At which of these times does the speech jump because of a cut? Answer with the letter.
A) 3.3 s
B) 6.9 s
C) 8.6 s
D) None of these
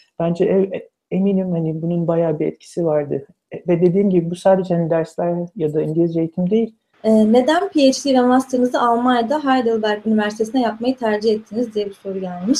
B